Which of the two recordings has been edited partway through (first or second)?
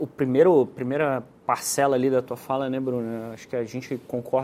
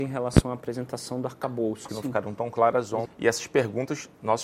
second